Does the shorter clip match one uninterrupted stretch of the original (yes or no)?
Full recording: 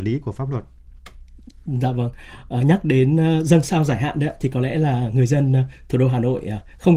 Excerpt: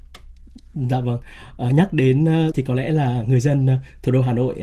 no